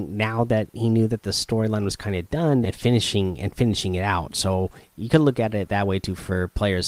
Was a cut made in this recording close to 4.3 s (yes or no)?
no